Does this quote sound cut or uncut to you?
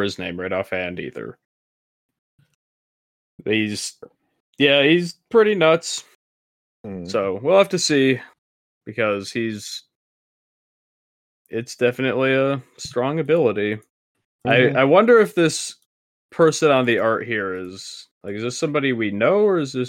cut